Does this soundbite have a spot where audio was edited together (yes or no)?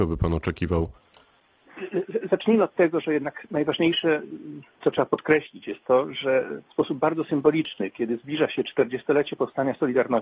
yes